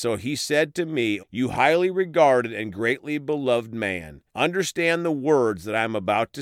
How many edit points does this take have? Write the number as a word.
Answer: two